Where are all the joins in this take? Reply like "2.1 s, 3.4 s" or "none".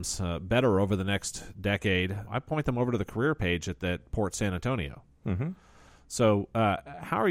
2.3 s